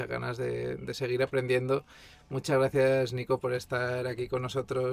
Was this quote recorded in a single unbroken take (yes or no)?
yes